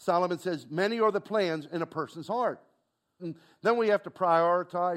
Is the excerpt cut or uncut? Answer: cut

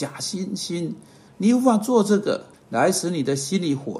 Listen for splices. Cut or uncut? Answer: cut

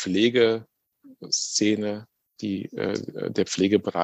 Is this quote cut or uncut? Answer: uncut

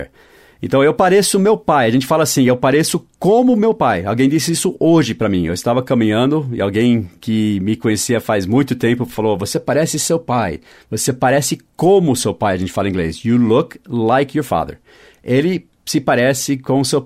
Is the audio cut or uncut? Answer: uncut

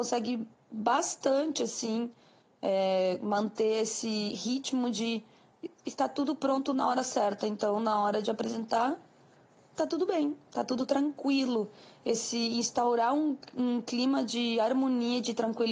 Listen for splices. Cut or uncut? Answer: uncut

